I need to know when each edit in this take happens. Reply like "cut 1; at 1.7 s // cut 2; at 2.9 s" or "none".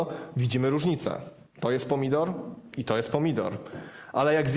none